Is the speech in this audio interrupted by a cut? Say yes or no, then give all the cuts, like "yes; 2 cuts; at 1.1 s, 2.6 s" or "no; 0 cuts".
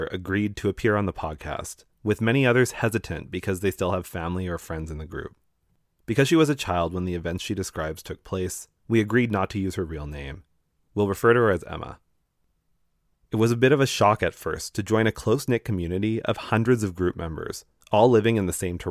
yes; 1 cut; at 13.1 s